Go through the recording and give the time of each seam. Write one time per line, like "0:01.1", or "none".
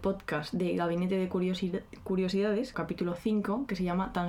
0:02.7